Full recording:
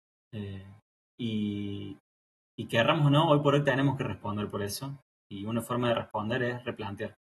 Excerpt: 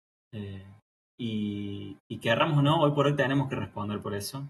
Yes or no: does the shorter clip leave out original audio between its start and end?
yes